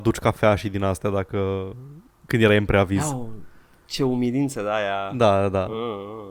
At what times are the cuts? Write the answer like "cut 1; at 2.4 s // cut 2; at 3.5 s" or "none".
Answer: none